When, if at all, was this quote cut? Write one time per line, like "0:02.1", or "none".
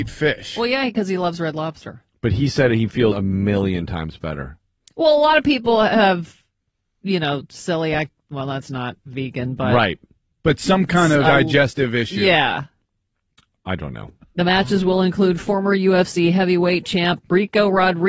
0:11.2
0:14.2